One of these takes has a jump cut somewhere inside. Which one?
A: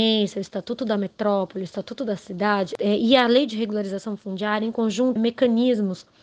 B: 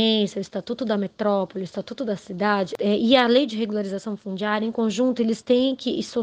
A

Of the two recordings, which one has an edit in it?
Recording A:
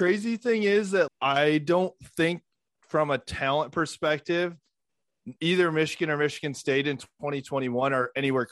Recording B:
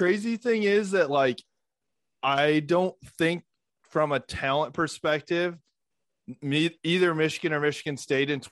A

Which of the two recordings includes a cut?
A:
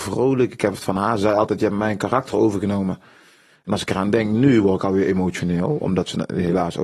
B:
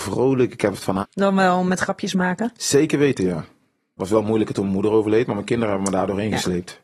B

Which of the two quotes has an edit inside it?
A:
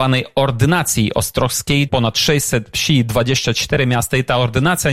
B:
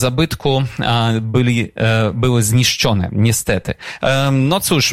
A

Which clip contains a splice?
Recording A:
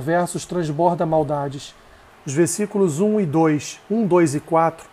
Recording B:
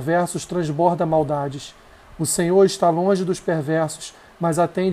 A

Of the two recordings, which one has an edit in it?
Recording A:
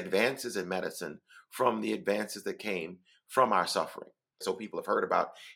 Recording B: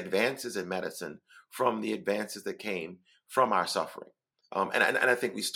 A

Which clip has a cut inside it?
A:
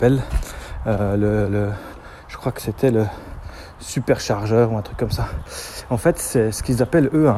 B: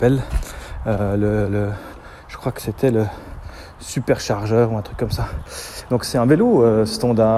B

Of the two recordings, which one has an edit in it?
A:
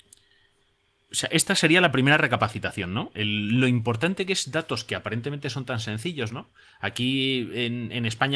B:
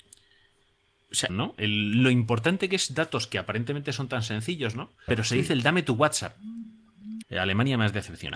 B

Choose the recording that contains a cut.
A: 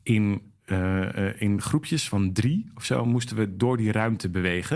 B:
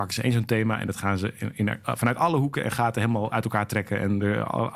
B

